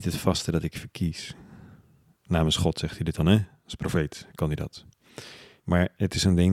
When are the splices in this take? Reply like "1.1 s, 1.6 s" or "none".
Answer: 5.6 s